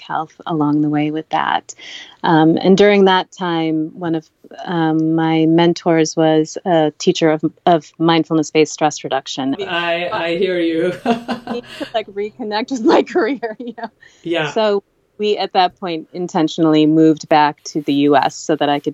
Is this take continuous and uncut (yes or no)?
no